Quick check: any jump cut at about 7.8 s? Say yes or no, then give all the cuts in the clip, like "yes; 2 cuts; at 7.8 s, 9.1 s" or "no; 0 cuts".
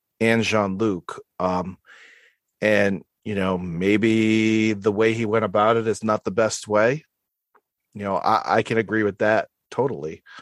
no; 0 cuts